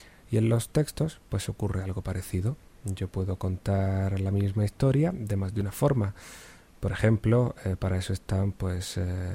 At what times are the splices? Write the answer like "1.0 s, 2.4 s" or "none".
none